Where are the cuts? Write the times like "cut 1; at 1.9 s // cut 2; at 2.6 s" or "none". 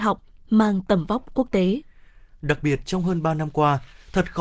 none